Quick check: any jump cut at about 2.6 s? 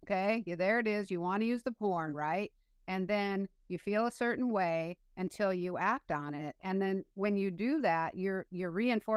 no; 0 cuts

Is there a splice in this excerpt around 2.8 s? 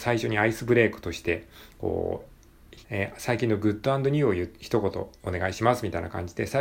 yes; 1 cut; at 2.8 s

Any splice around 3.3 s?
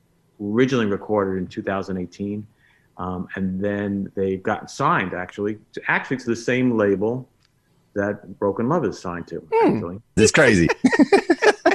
no; 1 cut; at 10.2 s

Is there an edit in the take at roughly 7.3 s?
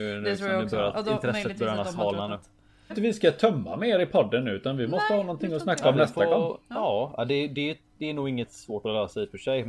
no; 1 cut; at 2.9 s

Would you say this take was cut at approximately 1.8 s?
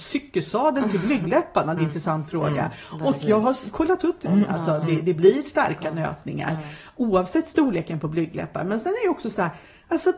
yes; 2 cuts; at 1.8 s, 4.3 s

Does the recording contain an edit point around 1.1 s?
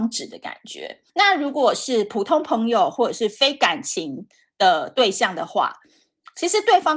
yes; 1 cut; at 1.1 s

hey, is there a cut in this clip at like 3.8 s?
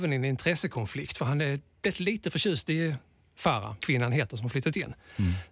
yes; 1 cut; at 3.8 s

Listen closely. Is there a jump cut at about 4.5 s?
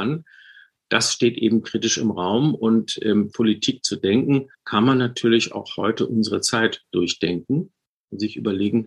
yes; 2 cuts; at 3.3 s, 4.5 s

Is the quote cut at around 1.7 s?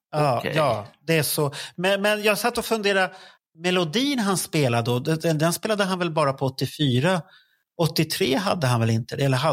no; 1 cut; at 3.4 s

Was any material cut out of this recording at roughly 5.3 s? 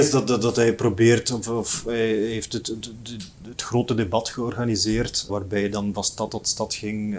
yes; 1 cut; at 5.3 s

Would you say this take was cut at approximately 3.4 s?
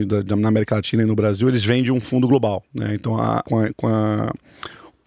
yes; 1 cut; at 3.4 s

